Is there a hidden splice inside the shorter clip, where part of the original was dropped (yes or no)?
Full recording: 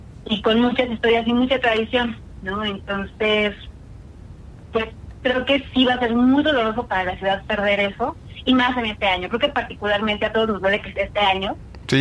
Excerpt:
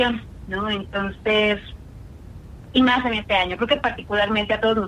yes